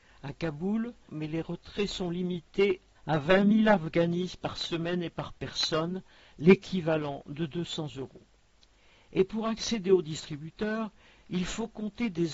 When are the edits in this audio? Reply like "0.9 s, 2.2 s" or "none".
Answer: 1.1 s